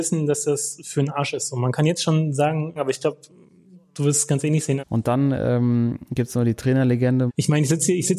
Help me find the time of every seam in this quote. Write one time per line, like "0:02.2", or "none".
0:02.8
0:04.8
0:07.3